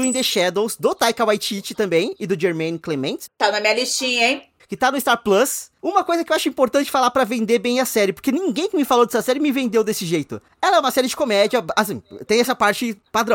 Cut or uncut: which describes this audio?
cut